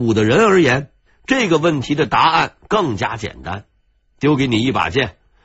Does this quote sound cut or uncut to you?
uncut